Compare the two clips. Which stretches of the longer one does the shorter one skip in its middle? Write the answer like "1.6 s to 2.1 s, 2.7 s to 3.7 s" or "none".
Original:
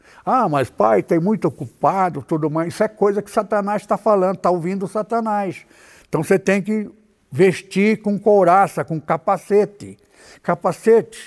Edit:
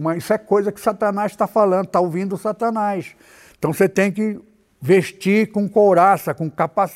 none